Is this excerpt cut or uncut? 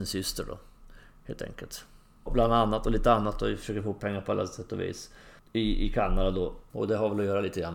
cut